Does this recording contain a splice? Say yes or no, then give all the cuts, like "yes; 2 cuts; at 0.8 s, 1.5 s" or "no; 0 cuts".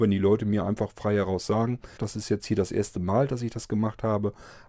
yes; 1 cut; at 2.0 s